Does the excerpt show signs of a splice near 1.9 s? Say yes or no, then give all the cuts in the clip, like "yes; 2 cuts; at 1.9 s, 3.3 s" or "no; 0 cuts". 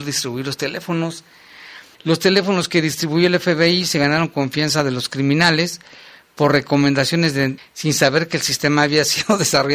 yes; 2 cuts; at 1.9 s, 7.6 s